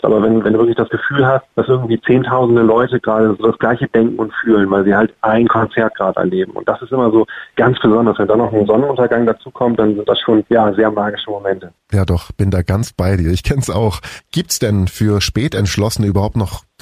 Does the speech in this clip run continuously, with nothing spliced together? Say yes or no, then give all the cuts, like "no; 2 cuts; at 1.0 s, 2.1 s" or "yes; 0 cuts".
yes; 0 cuts